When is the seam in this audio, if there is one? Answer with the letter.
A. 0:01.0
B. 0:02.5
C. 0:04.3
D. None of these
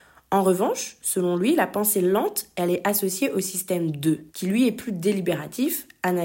C